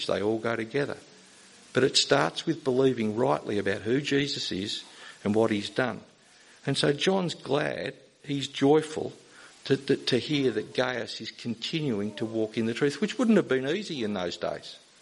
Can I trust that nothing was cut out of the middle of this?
yes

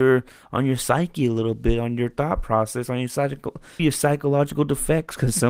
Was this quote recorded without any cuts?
no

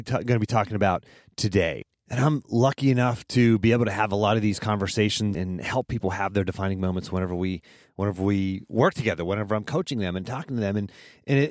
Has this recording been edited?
yes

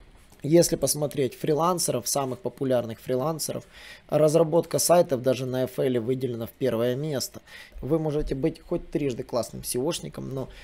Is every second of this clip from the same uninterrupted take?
no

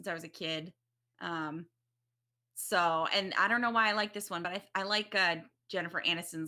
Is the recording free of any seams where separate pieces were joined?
yes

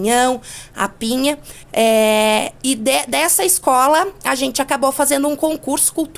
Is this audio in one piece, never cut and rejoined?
no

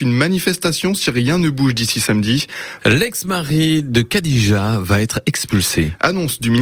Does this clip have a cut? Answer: yes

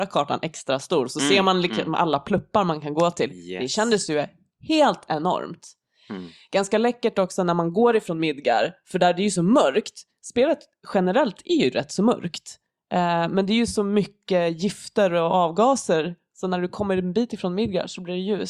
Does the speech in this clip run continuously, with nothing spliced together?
yes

